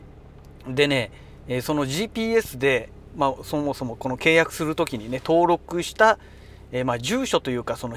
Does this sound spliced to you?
no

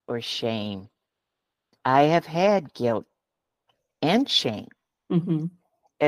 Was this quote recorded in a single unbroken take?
yes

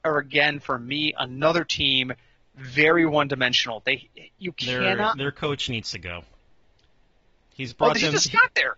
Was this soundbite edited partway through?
no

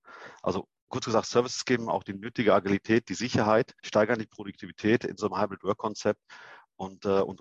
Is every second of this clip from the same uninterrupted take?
no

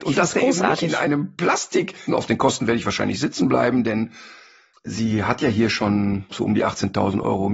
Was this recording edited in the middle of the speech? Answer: yes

